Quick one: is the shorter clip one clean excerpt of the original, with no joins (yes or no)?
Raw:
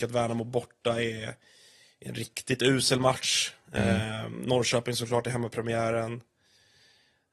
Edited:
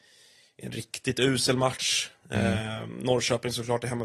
yes